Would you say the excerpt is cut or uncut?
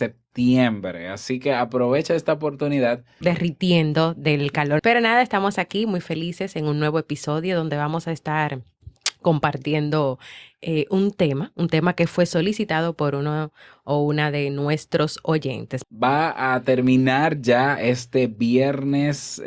cut